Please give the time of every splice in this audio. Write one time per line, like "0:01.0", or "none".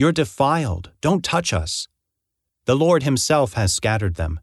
0:02.5